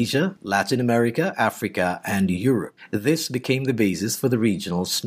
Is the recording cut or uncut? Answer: uncut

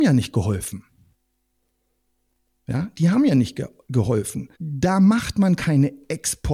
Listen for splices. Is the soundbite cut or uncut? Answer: cut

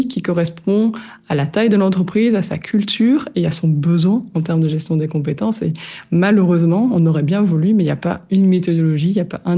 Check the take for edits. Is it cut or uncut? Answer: uncut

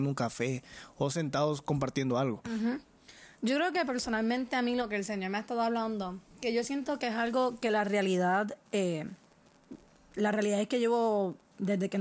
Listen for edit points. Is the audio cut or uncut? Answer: uncut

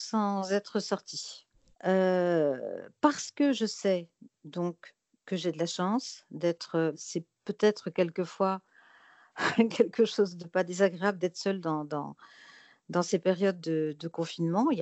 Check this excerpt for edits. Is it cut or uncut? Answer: cut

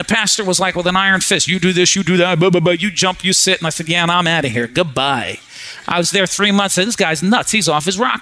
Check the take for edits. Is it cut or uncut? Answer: uncut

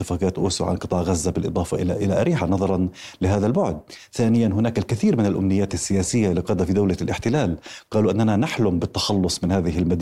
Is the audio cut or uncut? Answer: cut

